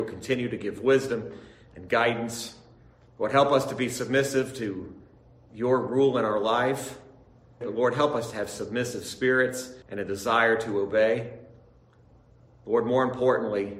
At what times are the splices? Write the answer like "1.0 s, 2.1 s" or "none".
7.6 s, 9.8 s